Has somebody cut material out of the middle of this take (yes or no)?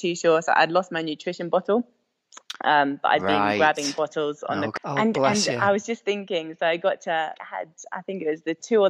yes